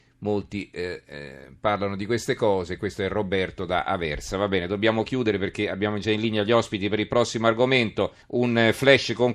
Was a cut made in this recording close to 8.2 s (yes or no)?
yes